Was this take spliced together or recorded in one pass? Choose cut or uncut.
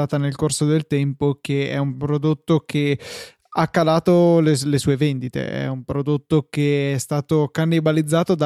uncut